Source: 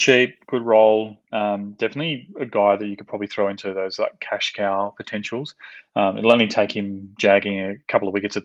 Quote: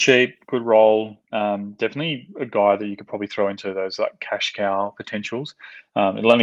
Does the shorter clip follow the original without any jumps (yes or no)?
yes